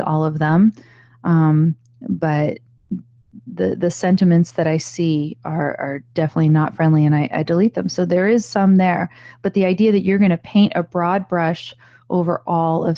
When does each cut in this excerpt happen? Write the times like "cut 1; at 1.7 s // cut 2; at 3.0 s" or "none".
none